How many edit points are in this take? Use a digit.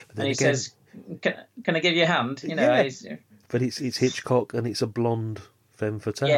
0